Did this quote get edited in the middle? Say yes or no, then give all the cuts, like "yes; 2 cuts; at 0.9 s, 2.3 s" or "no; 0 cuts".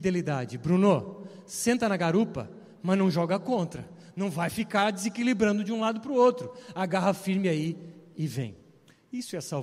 no; 0 cuts